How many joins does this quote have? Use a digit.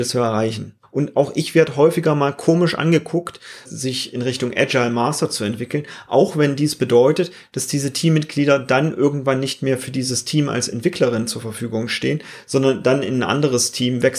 1